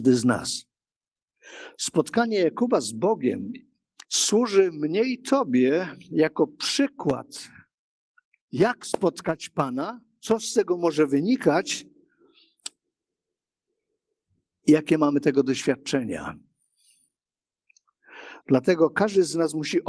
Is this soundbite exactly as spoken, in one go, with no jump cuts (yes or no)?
no